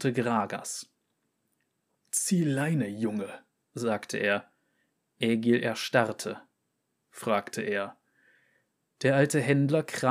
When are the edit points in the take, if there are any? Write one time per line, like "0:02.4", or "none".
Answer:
0:02.0
0:07.0